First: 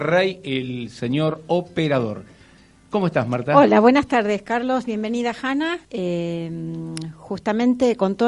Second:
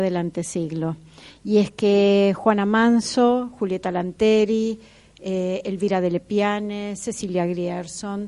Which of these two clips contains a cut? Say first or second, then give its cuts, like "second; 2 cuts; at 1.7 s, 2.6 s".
first; 1 cut; at 5.8 s